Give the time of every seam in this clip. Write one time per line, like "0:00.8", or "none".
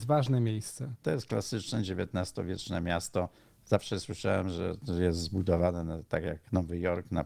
0:01.0

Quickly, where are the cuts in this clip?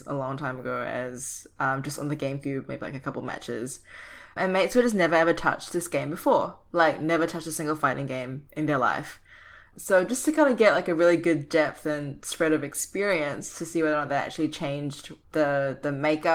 none

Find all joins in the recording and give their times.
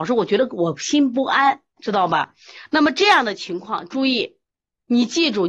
0:01.8

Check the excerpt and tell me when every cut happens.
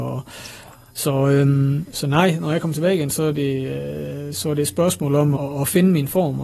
0:05.4

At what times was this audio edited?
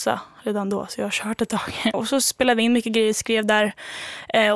0:01.9

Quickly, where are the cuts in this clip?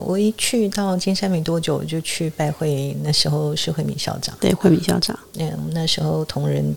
none

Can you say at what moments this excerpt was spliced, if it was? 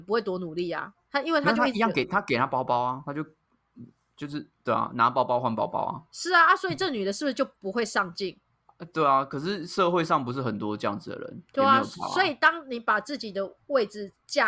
none

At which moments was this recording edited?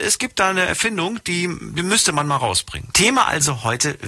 0:02.9

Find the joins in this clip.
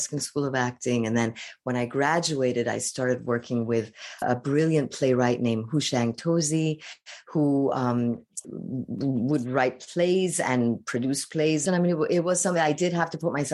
0:04.2
0:08.4
0:11.7

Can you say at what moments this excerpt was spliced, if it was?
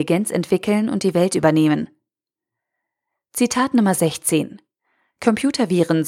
none

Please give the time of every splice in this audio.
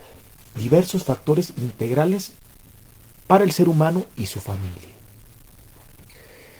none

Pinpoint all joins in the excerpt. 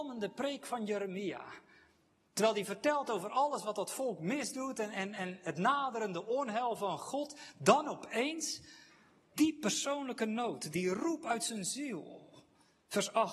0:09.3
0:10.7

